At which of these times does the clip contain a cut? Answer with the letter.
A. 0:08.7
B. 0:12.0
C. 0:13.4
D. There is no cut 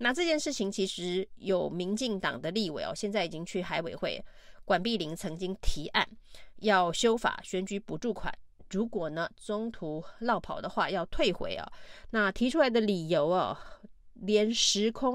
B